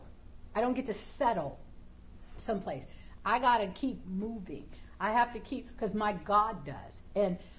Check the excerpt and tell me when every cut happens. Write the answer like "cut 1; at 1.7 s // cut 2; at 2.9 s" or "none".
cut 1; at 3.2 s